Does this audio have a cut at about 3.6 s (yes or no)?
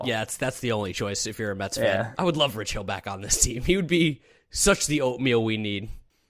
no